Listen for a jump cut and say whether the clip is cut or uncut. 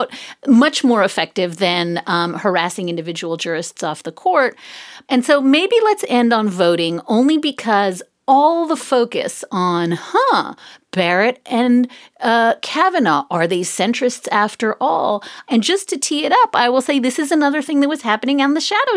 cut